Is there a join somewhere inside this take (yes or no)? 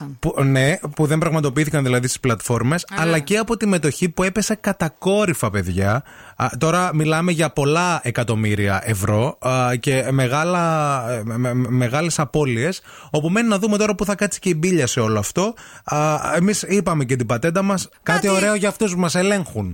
yes